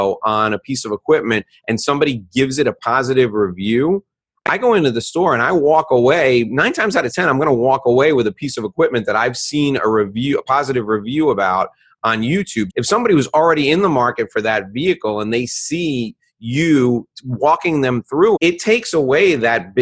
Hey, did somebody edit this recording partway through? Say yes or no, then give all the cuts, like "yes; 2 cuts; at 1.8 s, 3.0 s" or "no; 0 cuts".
yes; 2 cuts; at 12.7 s, 18.4 s